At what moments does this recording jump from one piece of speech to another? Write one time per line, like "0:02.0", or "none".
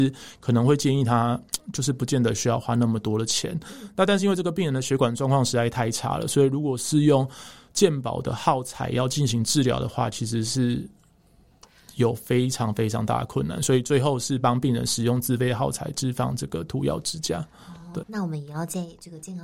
0:18.0